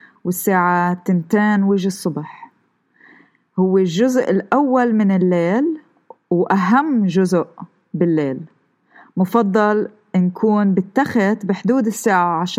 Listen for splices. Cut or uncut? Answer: uncut